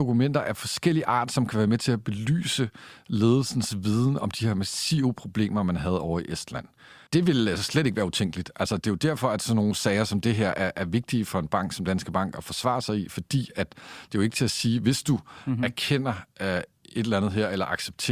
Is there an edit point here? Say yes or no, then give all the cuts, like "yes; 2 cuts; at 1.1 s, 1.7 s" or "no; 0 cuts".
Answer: yes; 1 cut; at 7.1 s